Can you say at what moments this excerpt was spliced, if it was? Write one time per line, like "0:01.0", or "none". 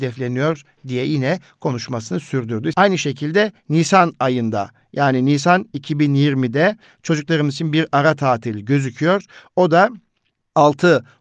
0:02.7